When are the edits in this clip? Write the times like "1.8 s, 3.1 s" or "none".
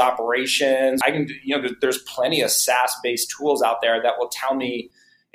1.0 s